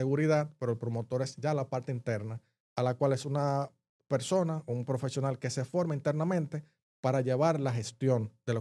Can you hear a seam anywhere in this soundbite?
no; 0 cuts

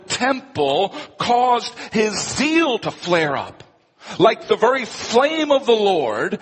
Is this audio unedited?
yes; 0 cuts

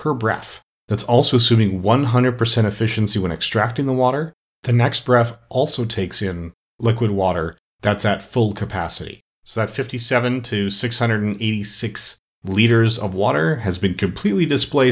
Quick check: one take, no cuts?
no; 1 cut; at 4.5 s

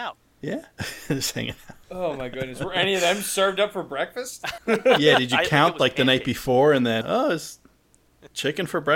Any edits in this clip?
yes; 2 cuts; at 4.6 s, 7.0 s

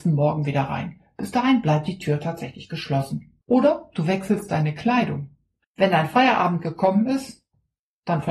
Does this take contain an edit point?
yes; 2 cuts; at 3.4 s, 5.6 s

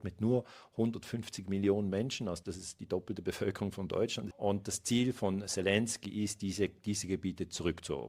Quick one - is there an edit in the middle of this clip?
yes; 2 cuts; at 2.4 s, 4.3 s

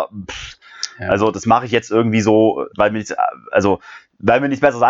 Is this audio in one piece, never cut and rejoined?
no; 1 cut; at 2.7 s

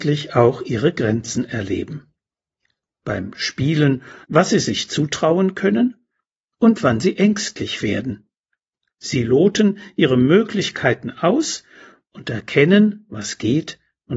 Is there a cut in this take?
yes; 1 cut; at 4.2 s

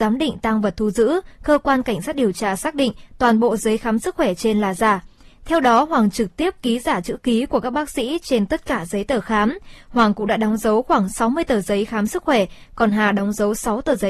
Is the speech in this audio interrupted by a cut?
no; 0 cuts

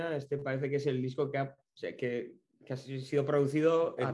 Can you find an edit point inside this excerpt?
no; 0 cuts

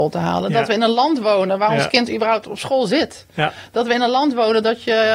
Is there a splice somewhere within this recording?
no; 0 cuts

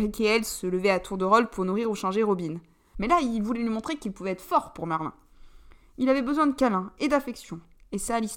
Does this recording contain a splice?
yes; 1 cut; at 2.9 s

